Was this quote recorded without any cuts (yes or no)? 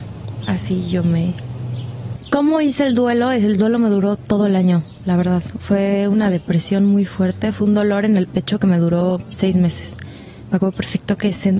yes